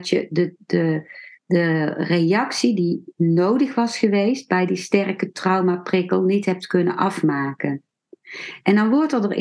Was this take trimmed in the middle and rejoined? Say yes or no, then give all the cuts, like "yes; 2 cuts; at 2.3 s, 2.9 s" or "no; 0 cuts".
yes; 1 cut; at 1.3 s